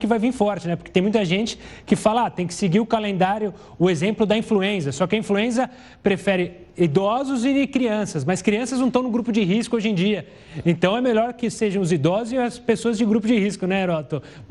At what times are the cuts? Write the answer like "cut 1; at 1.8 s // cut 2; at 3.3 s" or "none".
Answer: none